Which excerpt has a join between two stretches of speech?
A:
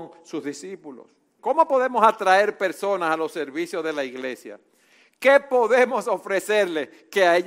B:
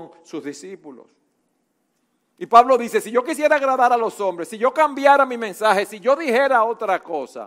A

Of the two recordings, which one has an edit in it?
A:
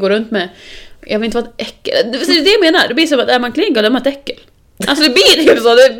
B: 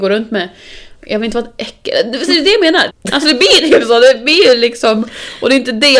B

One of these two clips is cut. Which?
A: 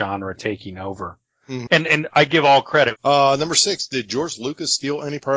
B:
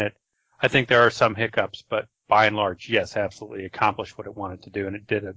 A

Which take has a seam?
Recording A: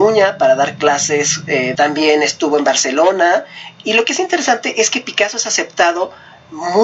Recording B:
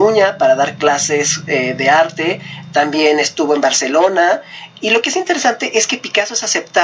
A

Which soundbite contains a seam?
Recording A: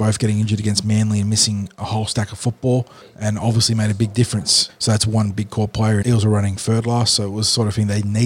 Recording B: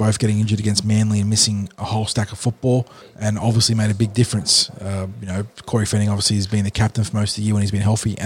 A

